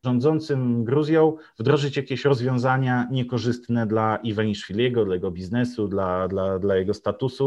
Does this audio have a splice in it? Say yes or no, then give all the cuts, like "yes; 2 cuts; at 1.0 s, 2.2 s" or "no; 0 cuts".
no; 0 cuts